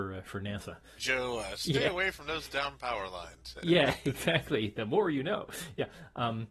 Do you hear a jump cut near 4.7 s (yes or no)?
no